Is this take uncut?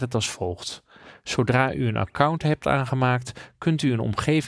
yes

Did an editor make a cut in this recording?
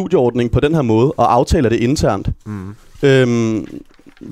no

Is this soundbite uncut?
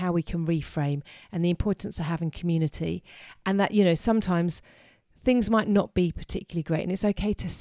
yes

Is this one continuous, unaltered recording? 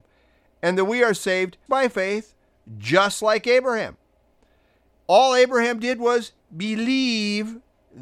no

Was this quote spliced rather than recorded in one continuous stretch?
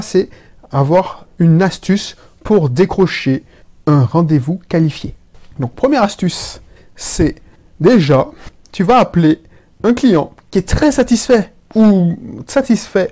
no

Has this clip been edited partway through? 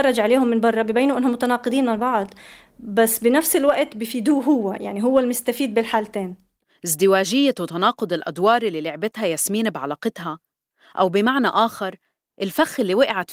no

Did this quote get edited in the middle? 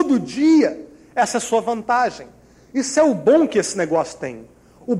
no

